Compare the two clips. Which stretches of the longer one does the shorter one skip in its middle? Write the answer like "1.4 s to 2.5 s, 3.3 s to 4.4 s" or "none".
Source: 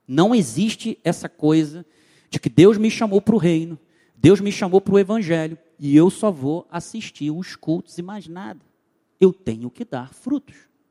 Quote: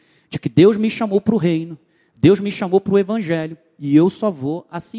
none